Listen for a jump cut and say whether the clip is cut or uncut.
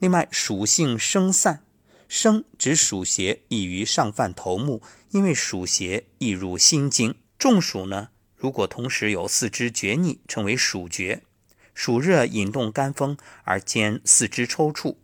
cut